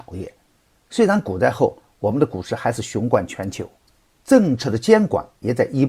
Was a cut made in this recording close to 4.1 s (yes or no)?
yes